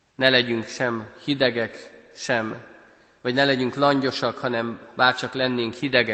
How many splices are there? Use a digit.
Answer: 0